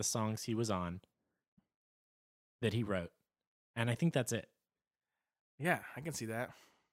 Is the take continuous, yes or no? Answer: yes